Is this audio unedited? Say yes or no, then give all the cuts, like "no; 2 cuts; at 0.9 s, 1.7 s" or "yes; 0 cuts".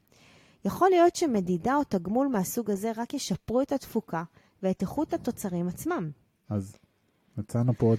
no; 1 cut; at 6.4 s